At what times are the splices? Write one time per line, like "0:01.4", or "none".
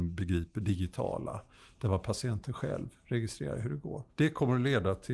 0:04.1